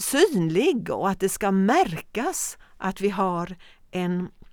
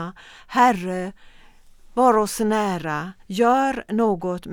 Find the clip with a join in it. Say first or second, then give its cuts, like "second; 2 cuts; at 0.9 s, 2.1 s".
second; 1 cut; at 3.2 s